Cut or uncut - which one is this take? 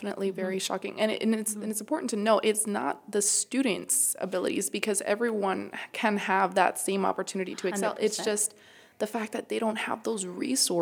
uncut